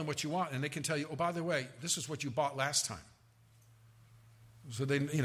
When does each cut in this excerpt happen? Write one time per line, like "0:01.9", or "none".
none